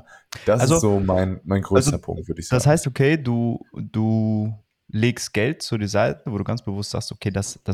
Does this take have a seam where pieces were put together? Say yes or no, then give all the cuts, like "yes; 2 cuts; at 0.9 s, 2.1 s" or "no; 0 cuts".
yes; 2 cuts; at 2.8 s, 6.3 s